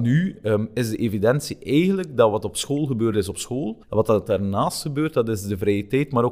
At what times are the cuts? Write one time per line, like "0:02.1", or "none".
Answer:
0:03.8